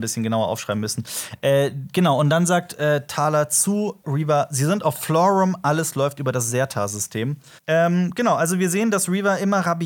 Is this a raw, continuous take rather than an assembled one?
no; 2 cuts; at 4.0 s, 7.6 s

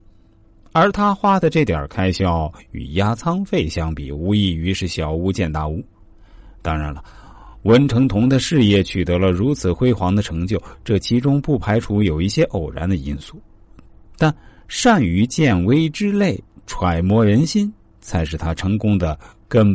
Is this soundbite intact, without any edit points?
yes; 0 cuts

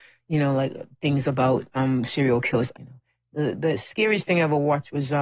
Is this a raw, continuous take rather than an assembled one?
no; 1 cut; at 2.7 s

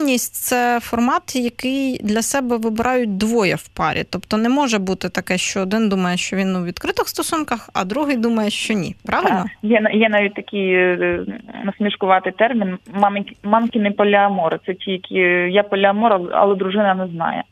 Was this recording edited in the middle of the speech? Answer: no; 0 cuts

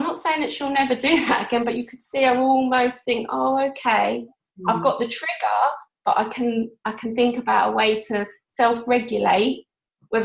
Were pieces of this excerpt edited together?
no; 0 cuts

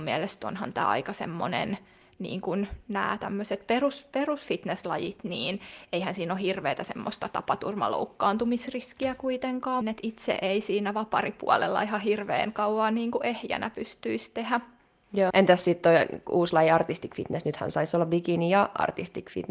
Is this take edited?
yes; 2 cuts; at 9.8 s, 15.3 s

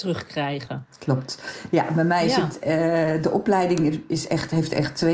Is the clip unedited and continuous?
yes; 0 cuts

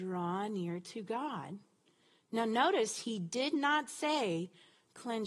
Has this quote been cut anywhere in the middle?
no; 0 cuts

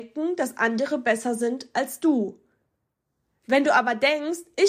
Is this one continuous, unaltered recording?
yes; 0 cuts

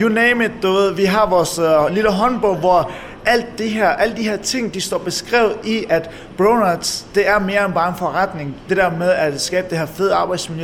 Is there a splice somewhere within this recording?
no; 0 cuts

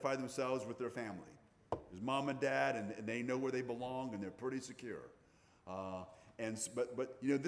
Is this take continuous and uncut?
yes; 0 cuts

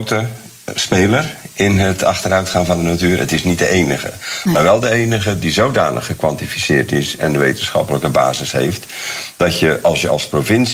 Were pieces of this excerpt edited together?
no; 0 cuts

